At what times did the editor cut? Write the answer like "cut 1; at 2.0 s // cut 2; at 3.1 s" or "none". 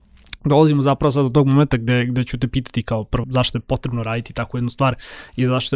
cut 1; at 3.2 s

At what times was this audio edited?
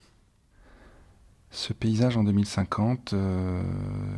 none

